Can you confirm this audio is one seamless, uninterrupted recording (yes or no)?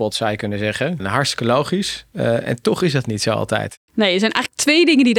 no